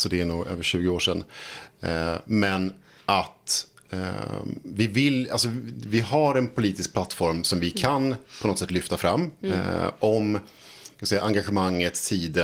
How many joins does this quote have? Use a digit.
0